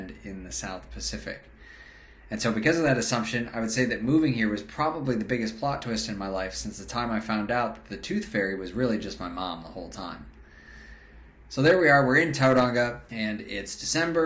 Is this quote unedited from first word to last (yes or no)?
no